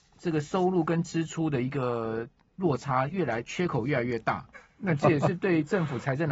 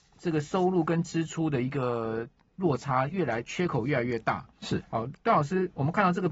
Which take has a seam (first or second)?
first